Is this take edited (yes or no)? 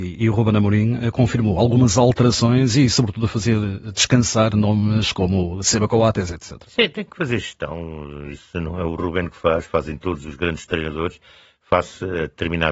no